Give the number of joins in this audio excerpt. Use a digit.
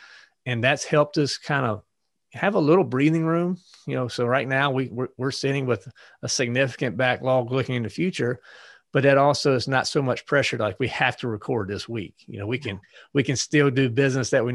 0